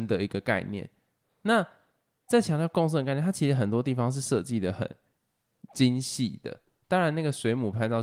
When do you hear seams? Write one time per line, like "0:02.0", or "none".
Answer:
none